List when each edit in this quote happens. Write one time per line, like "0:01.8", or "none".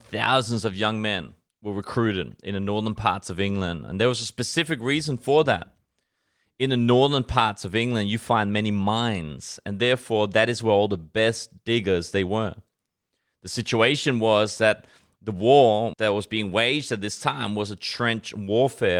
none